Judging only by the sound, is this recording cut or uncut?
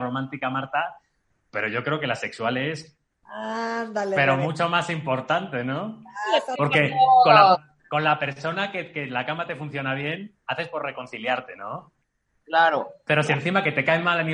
uncut